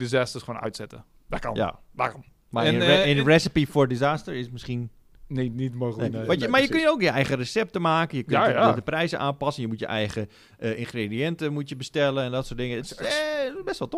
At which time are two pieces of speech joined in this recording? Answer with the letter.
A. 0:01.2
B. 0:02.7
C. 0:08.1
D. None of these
D